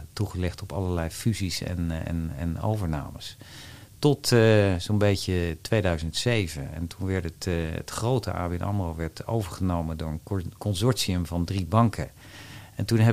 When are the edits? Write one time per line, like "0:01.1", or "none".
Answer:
none